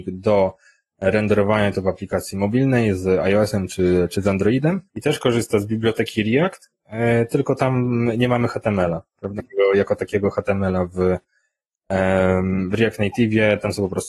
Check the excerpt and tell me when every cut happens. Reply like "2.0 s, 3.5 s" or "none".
4.9 s, 9.4 s